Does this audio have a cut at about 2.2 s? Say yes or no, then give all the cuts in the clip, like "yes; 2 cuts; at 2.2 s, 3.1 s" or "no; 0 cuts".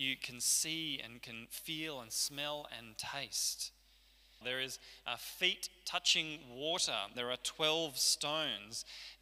no; 2 cuts; at 4.4 s, 7.1 s